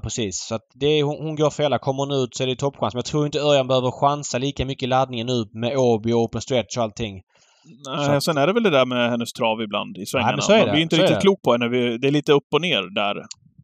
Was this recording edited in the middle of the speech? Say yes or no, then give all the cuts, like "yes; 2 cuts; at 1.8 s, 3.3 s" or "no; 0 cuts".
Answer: no; 0 cuts